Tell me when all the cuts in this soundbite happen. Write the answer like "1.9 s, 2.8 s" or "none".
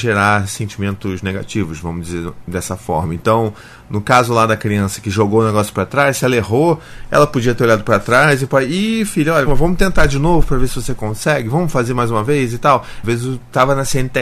9.5 s, 13.0 s